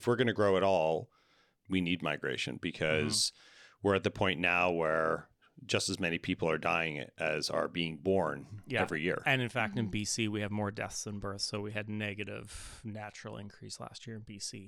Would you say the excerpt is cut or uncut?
uncut